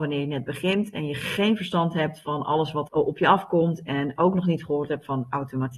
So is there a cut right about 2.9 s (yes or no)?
yes